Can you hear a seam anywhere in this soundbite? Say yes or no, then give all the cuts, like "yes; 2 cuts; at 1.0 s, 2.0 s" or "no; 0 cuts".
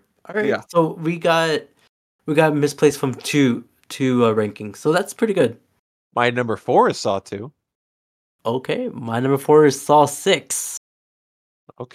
yes; 1 cut; at 6.1 s